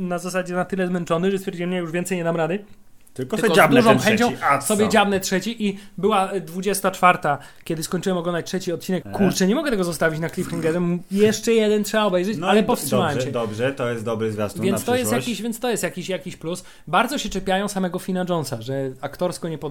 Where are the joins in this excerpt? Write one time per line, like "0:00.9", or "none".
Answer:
0:09.0